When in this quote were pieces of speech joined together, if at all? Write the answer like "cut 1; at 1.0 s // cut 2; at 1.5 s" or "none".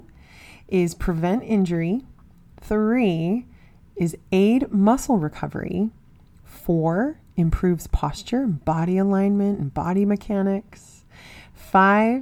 none

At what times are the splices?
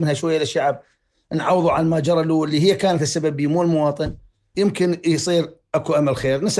cut 1; at 4.5 s

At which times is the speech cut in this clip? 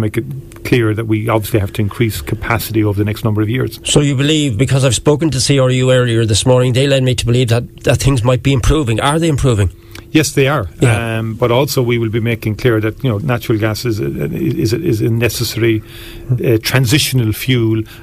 cut 1; at 13.2 s

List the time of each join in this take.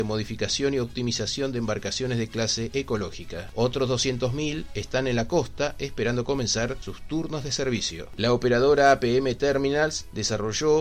cut 1; at 3.5 s

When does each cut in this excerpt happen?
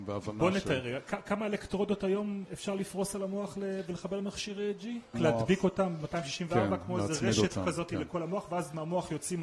cut 1; at 5.1 s

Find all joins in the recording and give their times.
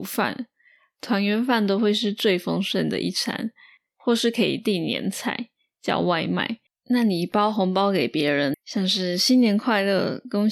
cut 1; at 6.7 s // cut 2; at 8.5 s

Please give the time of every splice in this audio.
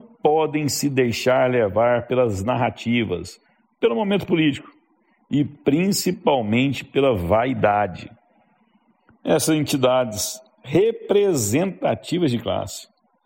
cut 1; at 9.1 s

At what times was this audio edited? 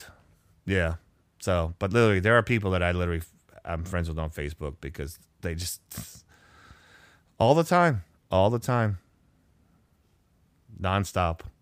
none

